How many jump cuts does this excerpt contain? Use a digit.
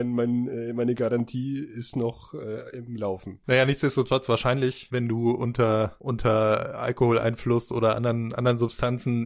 0